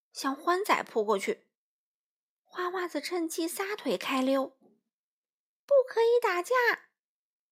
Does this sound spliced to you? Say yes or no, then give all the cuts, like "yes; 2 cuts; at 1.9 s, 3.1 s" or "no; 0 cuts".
no; 0 cuts